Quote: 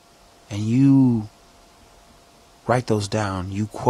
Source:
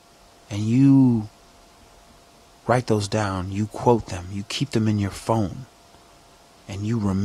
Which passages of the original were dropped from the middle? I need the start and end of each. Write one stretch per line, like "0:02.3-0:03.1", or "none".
none